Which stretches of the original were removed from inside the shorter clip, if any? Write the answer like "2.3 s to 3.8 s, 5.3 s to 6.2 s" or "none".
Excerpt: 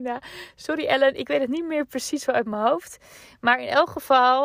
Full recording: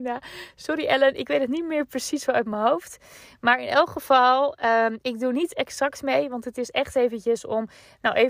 none